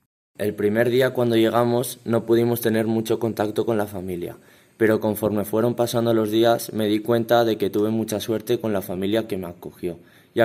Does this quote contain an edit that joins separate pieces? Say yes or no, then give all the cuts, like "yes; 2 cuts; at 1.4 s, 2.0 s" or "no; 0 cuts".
no; 0 cuts